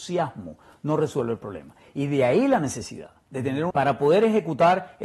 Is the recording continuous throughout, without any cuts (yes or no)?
no